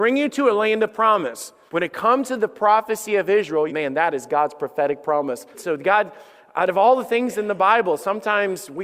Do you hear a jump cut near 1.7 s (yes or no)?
yes